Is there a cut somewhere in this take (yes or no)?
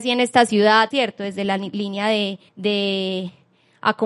yes